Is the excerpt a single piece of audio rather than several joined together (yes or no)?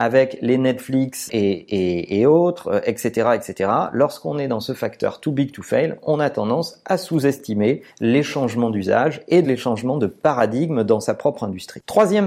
no